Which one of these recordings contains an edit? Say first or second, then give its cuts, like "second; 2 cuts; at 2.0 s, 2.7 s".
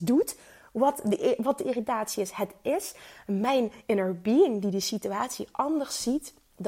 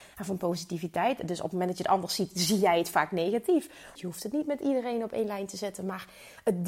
second; 1 cut; at 3.9 s